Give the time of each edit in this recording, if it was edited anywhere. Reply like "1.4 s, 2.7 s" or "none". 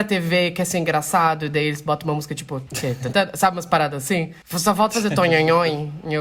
3.1 s